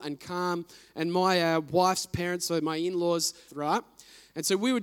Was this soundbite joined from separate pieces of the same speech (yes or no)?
yes